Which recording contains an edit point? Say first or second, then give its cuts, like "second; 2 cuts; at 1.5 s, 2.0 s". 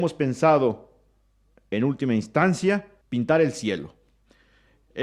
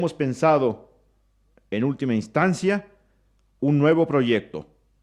first; 1 cut; at 3.0 s